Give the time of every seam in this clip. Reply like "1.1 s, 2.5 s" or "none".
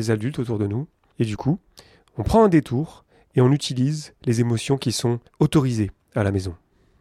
1.1 s, 5.3 s